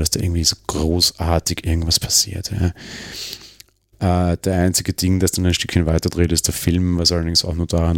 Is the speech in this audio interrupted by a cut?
no; 0 cuts

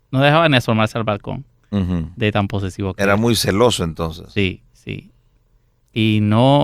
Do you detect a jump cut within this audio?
no; 0 cuts

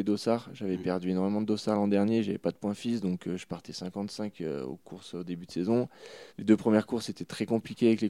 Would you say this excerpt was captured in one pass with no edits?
no; 1 cut; at 6.3 s

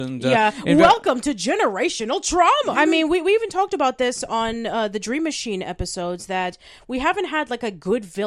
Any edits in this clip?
yes; 1 cut; at 2.7 s

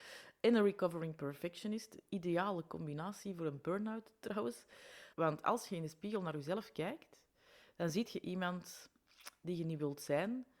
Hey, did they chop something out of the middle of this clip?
yes; 1 cut; at 5.1 s

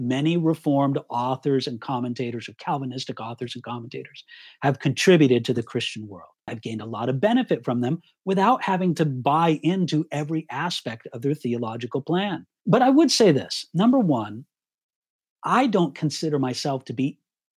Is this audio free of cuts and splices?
no; 3 cuts; at 6.5 s, 12.6 s, 15.3 s

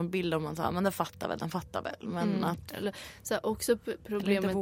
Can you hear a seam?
no; 0 cuts

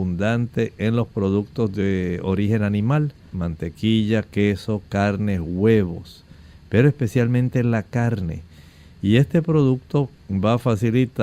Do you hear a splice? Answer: yes; 1 cut; at 3.3 s

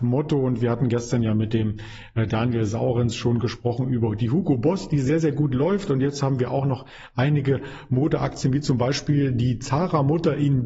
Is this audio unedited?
yes; 0 cuts

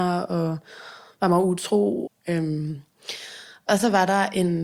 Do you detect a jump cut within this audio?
yes; 1 cut; at 2.1 s

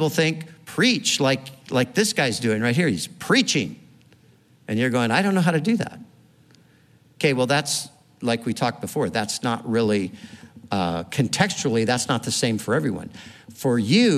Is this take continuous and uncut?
yes; 0 cuts

